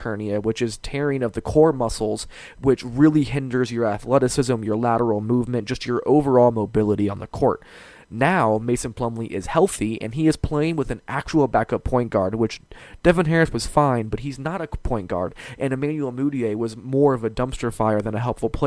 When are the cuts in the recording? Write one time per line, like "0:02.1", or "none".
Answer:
none